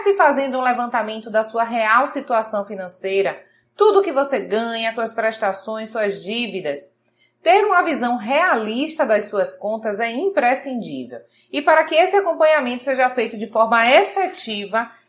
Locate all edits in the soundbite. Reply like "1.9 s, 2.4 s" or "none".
4.9 s